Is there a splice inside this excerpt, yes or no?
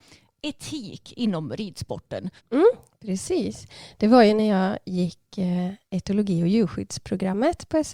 yes